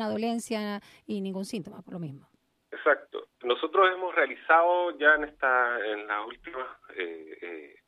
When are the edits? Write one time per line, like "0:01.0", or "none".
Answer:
0:03.3